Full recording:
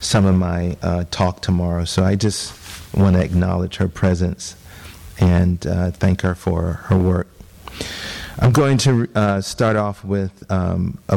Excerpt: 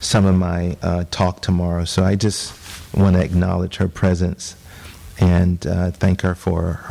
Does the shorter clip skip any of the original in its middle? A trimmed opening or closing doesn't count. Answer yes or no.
no